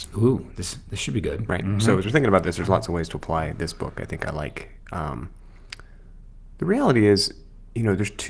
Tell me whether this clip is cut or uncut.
uncut